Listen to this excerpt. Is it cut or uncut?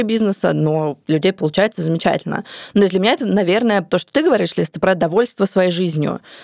uncut